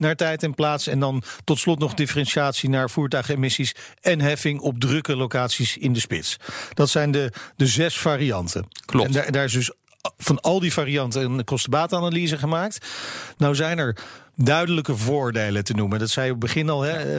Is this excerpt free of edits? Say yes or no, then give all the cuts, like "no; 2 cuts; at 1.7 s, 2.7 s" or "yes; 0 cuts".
yes; 0 cuts